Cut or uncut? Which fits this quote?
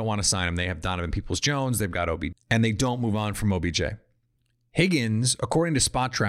cut